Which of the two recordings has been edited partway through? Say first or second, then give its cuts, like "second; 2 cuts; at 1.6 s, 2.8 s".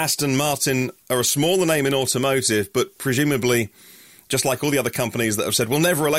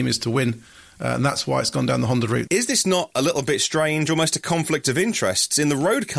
second; 1 cut; at 2.5 s